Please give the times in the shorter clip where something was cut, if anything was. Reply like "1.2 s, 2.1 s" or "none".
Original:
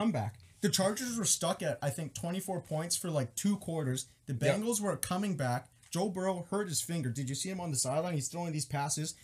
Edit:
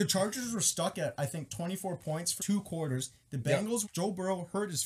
2.4 s, 3.8 s